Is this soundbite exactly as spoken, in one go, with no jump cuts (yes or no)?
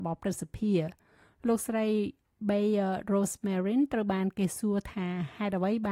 yes